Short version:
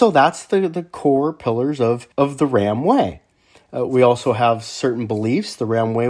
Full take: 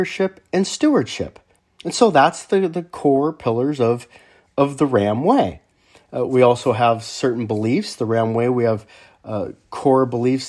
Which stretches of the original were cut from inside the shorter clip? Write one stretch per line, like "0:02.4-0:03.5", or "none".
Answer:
0:04.1-0:04.5